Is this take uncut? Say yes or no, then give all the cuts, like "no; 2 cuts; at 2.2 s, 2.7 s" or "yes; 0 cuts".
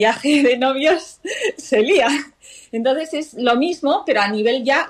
yes; 0 cuts